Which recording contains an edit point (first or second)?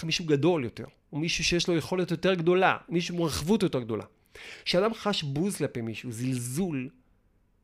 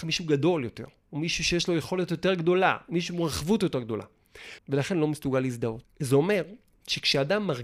second